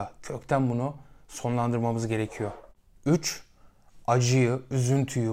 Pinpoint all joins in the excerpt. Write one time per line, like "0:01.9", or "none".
none

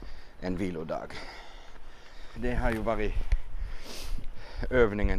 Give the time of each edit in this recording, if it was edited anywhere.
0:02.4

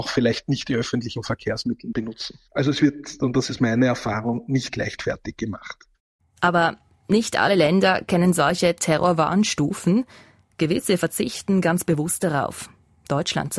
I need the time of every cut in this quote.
none

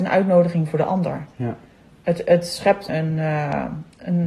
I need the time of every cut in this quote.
0:02.9

